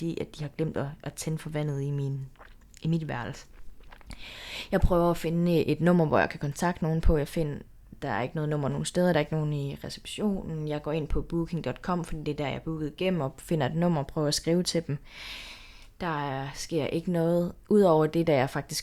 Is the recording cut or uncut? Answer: uncut